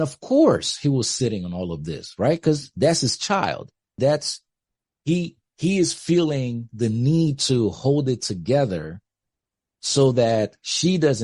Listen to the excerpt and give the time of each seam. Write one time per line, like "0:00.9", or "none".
0:04.0

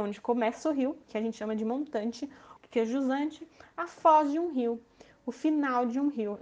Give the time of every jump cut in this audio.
0:02.6

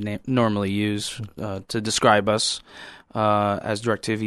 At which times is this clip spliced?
none

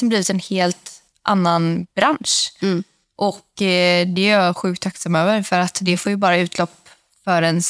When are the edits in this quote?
none

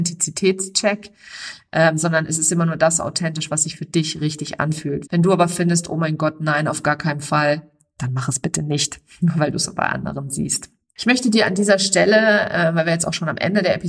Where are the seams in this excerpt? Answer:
0:05.0

